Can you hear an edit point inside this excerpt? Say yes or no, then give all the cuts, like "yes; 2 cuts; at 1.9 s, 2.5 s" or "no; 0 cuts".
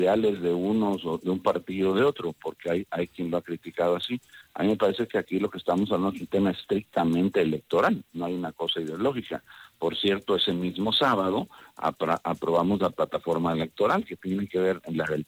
no; 0 cuts